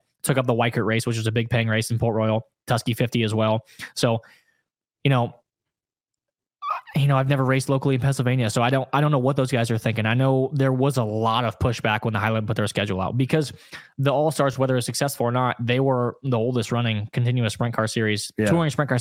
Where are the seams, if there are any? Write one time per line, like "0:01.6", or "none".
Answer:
none